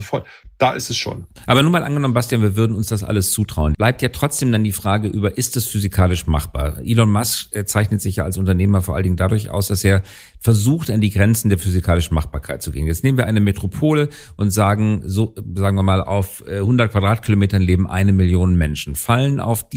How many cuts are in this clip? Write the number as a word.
one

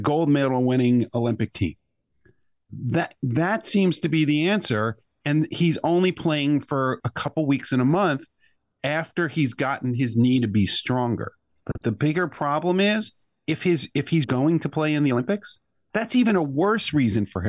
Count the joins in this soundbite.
two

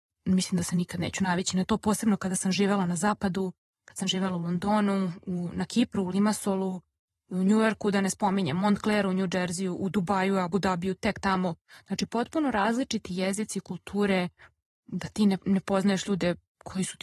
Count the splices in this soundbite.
zero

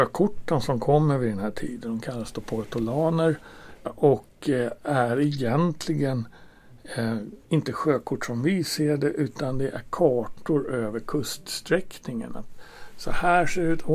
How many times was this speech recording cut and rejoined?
two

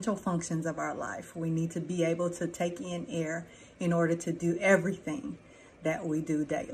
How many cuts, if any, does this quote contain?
zero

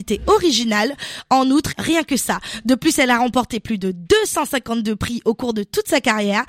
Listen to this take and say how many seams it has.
one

